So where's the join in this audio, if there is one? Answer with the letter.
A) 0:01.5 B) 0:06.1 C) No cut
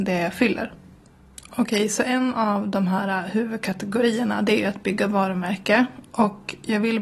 A